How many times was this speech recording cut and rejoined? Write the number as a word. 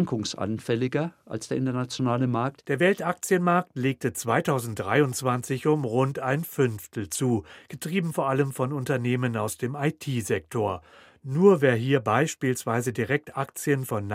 zero